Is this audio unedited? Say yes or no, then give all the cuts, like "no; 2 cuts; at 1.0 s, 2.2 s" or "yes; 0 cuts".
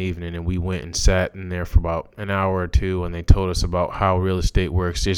yes; 0 cuts